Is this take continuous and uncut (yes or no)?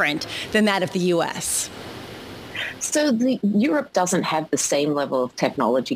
yes